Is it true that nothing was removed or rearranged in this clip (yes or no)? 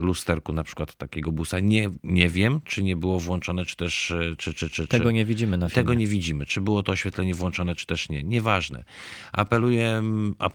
yes